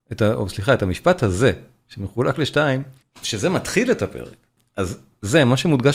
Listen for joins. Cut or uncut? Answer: cut